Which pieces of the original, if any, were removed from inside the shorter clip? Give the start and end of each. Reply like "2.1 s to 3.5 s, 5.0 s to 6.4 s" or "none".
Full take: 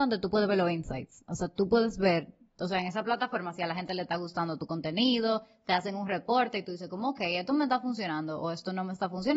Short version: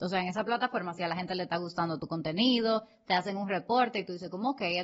none